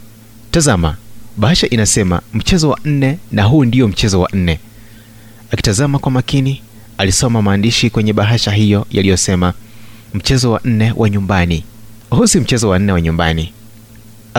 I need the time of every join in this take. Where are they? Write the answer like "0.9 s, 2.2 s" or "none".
12.0 s

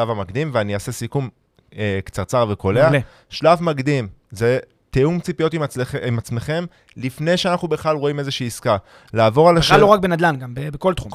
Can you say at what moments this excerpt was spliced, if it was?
none

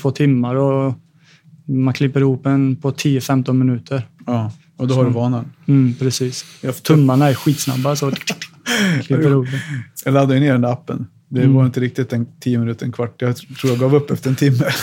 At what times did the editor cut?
none

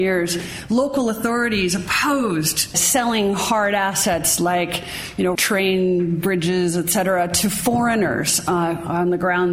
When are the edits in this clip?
2.7 s, 5.4 s

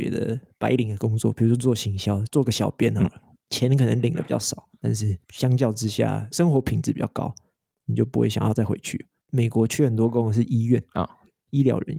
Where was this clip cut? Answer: 9.2 s

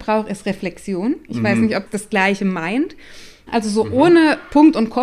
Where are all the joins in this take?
1.9 s, 3.5 s

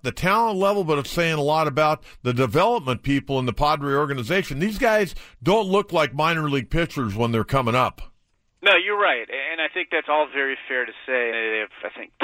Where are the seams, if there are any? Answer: 1.0 s, 11.3 s

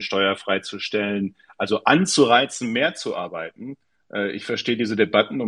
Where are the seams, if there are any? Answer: none

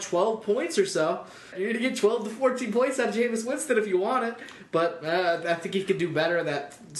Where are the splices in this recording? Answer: 1.5 s

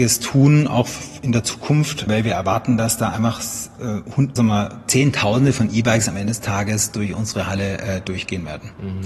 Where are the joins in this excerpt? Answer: 2.1 s, 4.4 s

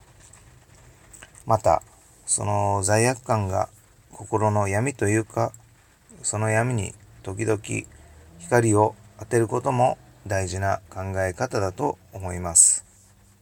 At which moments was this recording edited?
1.4 s, 6.1 s

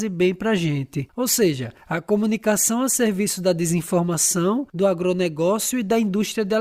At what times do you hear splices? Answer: none

